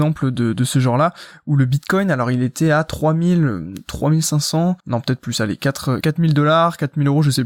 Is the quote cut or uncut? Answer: cut